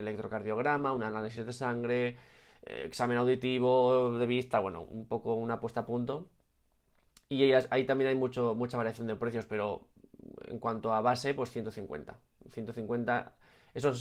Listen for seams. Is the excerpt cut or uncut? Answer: uncut